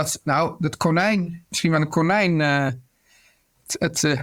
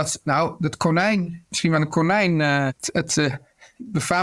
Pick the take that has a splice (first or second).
second